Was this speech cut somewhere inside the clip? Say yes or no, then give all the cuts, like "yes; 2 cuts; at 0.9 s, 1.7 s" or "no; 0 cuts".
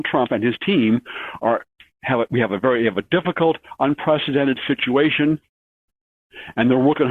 no; 0 cuts